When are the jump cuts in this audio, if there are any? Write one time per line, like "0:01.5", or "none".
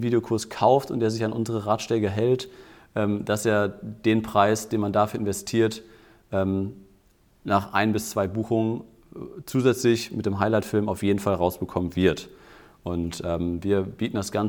none